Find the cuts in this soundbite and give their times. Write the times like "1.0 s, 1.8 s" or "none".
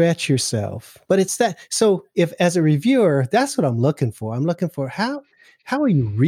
1.0 s

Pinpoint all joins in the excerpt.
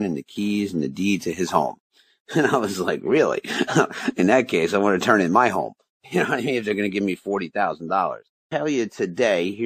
8.5 s

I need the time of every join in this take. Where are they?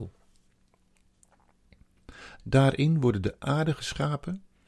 2.4 s

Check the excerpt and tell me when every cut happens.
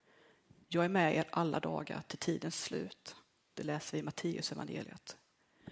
none

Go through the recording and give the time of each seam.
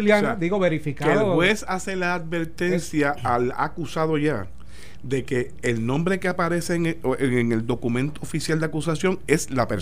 none

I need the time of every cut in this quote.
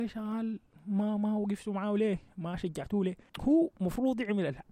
3.3 s

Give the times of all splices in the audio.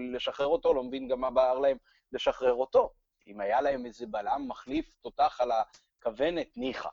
none

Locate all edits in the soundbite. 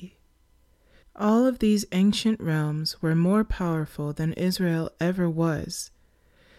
1.0 s

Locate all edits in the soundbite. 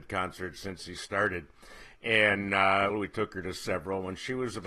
2.9 s

